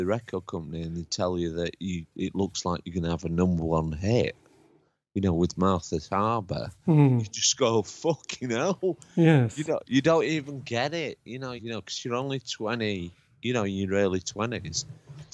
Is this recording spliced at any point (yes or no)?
yes